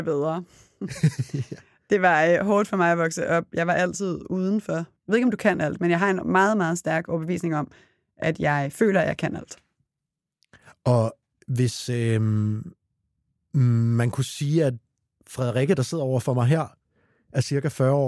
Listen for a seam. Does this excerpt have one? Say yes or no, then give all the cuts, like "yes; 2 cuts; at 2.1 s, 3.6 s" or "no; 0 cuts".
yes; 1 cut; at 5.0 s